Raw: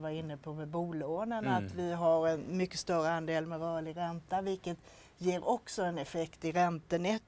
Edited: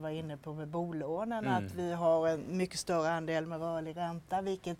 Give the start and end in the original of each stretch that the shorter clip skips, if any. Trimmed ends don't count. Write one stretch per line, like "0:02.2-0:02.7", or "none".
none